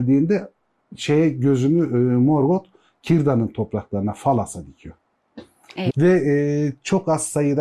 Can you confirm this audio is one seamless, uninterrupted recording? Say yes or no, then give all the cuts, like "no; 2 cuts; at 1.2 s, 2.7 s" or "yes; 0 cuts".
no; 1 cut; at 5.9 s